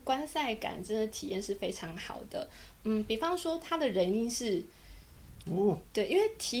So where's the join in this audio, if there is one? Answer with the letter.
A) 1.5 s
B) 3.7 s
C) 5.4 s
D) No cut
C